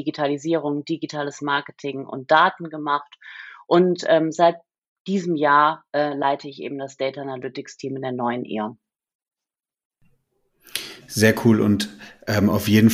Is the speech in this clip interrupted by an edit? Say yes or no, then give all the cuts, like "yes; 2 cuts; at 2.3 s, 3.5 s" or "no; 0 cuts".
no; 0 cuts